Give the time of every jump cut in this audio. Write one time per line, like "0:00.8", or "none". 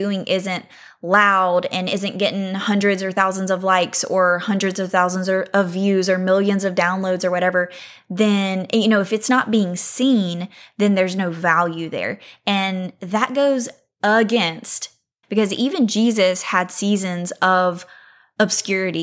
0:15.2